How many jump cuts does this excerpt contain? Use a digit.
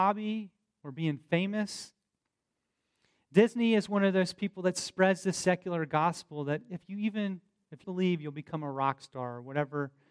1